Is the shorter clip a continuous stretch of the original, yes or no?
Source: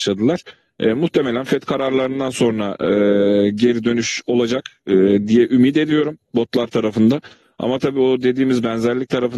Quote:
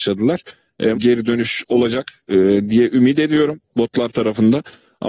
no